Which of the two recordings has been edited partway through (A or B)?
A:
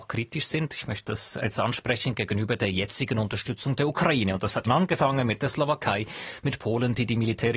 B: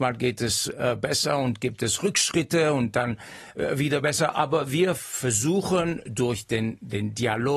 A